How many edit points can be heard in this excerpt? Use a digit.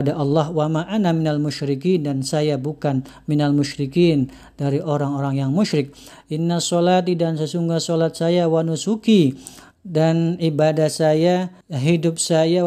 1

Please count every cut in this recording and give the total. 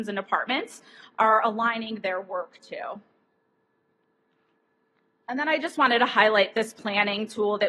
0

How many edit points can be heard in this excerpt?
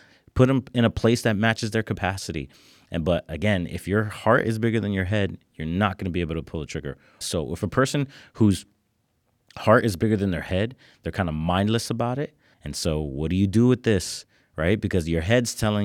2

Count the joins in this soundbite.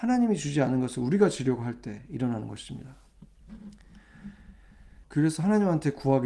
1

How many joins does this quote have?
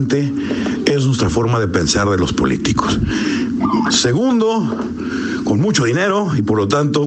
1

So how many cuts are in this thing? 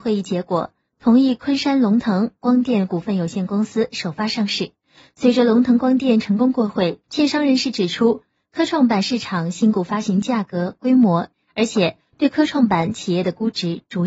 2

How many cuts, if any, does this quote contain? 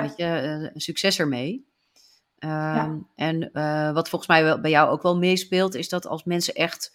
0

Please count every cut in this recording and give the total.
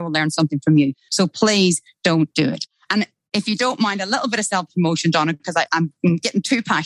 1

